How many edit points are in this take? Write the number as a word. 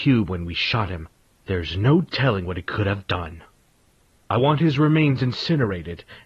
zero